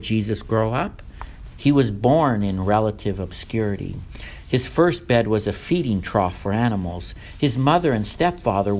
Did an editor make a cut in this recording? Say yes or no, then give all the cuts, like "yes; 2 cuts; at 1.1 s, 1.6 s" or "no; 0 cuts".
yes; 1 cut; at 1.5 s